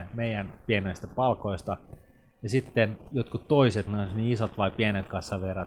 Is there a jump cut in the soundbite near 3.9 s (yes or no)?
yes